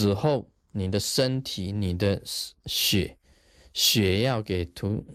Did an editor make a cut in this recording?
no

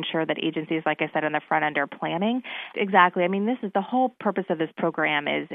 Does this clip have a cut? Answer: yes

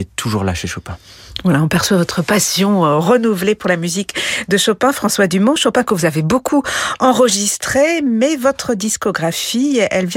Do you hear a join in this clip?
no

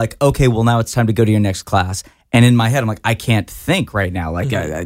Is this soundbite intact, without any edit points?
yes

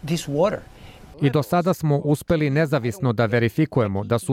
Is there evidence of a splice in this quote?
yes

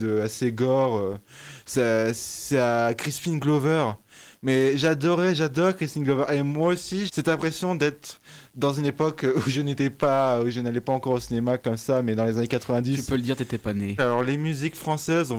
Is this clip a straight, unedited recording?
no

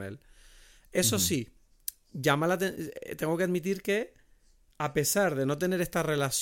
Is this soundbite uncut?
yes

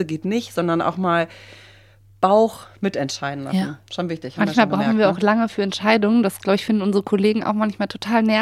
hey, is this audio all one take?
yes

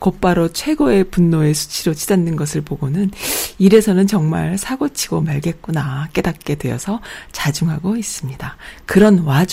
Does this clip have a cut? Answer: no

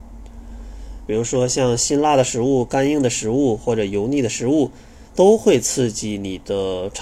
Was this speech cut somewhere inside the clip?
yes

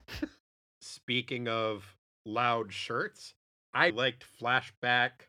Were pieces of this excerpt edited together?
yes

